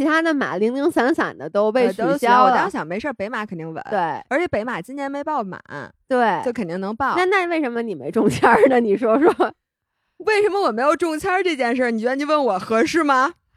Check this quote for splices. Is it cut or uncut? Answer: uncut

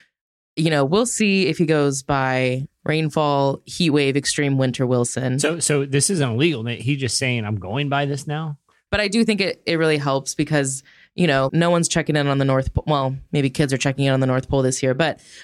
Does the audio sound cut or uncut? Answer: cut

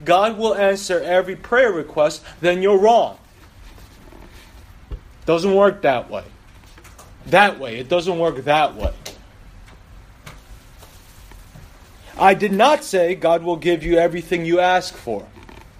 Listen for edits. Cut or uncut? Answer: uncut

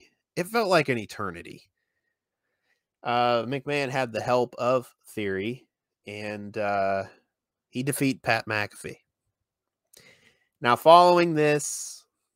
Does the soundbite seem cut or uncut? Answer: uncut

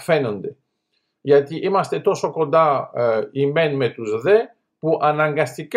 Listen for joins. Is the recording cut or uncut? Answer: uncut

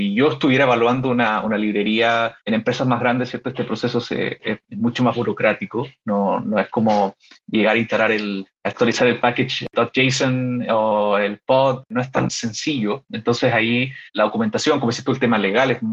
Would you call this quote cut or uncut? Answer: uncut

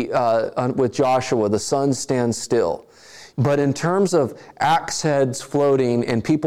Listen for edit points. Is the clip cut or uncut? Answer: cut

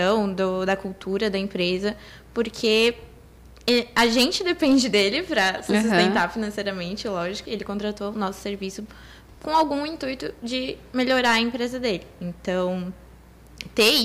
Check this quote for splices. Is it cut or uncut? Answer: cut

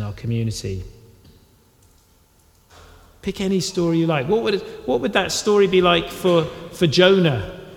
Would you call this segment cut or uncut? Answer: uncut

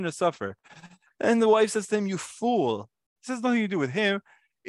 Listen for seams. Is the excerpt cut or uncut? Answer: cut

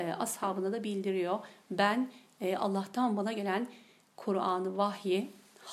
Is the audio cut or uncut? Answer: uncut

